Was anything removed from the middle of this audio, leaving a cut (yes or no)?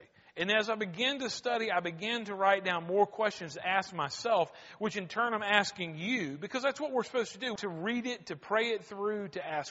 yes